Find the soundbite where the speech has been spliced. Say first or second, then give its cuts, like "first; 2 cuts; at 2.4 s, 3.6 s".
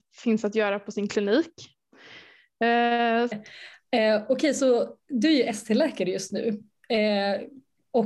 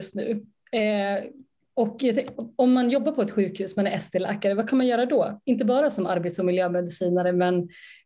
first; 1 cut; at 3.3 s